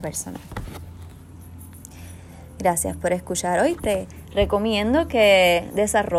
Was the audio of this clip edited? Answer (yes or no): no